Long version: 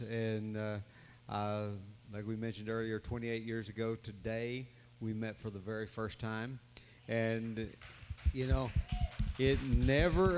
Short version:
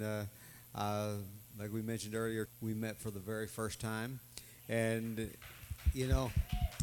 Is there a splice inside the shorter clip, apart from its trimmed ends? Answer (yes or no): yes